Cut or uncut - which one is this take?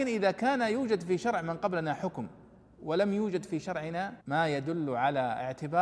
cut